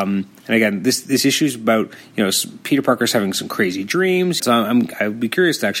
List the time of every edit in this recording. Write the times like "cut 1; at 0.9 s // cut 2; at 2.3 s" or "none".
cut 1; at 4.4 s